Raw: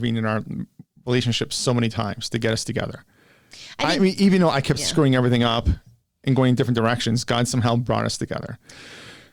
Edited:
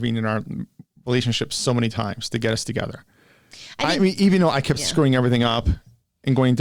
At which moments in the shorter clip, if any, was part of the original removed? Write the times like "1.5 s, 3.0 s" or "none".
none